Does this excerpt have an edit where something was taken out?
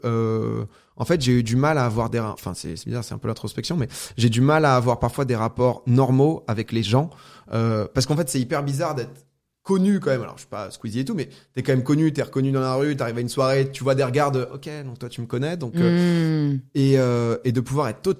no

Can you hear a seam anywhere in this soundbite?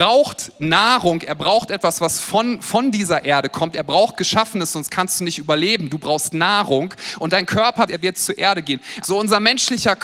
yes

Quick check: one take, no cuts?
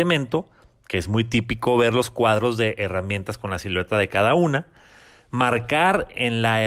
yes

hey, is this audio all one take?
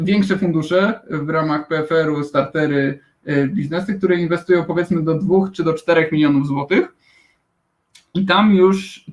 yes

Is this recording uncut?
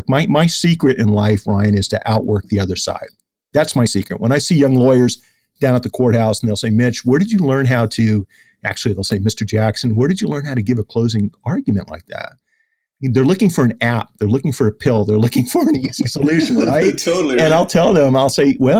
yes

